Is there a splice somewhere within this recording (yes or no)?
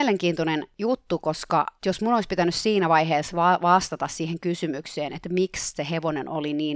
no